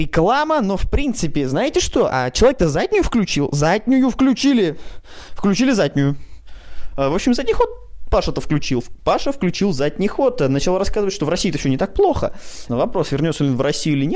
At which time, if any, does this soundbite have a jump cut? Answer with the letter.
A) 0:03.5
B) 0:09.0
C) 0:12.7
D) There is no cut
C